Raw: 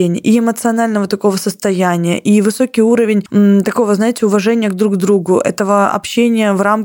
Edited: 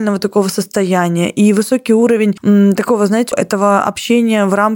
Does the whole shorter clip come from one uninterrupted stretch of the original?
no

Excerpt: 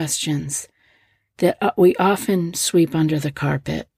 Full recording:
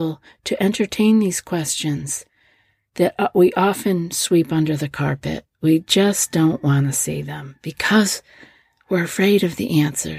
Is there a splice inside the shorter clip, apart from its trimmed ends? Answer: no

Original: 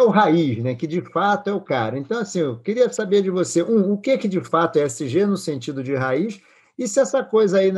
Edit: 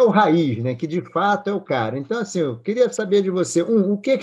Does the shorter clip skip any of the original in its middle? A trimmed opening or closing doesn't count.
no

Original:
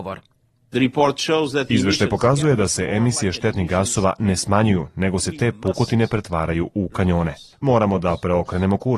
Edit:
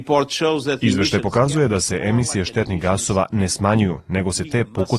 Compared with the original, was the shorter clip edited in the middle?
no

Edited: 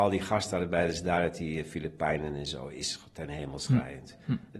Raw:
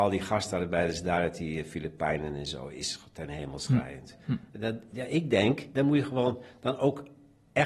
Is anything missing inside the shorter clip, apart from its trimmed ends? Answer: no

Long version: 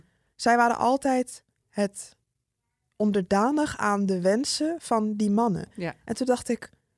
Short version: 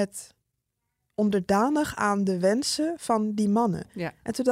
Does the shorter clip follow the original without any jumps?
yes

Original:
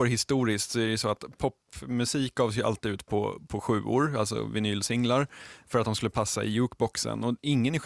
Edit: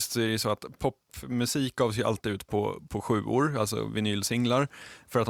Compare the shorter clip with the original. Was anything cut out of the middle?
no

